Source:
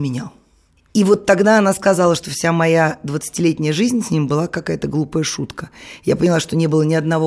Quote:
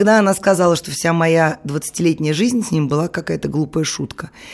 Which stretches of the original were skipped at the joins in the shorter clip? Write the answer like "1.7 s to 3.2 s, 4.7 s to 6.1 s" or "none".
none

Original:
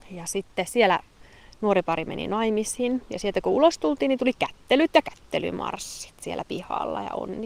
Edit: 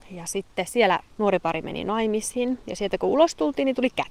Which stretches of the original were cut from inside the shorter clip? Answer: 1.1 s to 1.5 s

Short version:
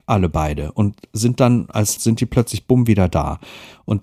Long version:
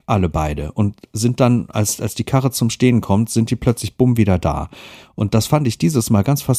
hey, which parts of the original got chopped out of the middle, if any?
2.0 s to 3.3 s

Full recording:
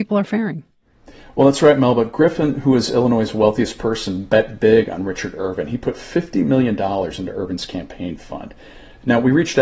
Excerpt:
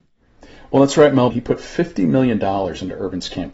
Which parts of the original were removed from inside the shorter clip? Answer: 1.9 s to 5.7 s

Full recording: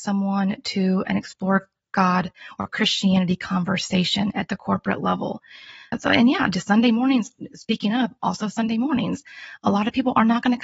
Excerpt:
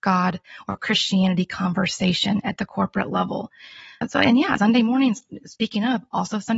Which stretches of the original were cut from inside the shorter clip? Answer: 6.5 s to 6.6 s

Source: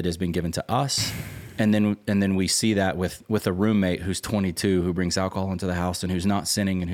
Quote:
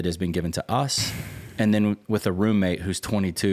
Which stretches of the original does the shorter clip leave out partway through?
2.0 s to 3.2 s

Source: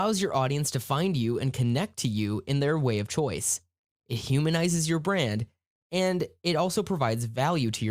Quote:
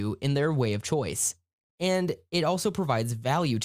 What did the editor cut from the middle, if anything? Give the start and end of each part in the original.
3.9 s to 5.8 s

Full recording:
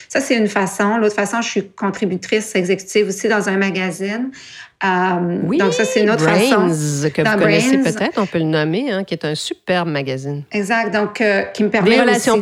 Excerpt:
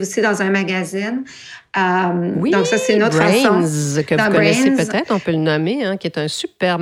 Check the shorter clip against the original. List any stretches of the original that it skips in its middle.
none

